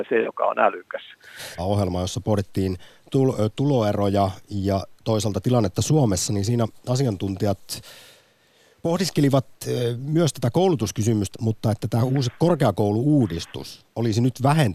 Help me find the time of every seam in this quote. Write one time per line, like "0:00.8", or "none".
0:01.6
0:11.3